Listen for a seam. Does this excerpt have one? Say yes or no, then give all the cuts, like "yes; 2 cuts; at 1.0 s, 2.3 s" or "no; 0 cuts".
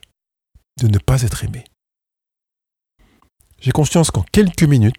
no; 0 cuts